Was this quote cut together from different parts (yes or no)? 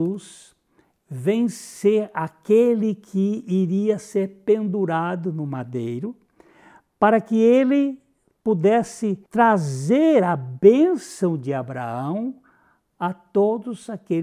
yes